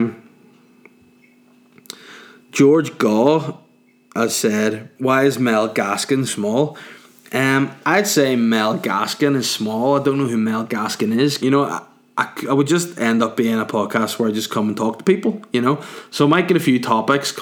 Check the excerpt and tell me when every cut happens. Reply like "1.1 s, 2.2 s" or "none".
5.0 s, 6.3 s, 11.4 s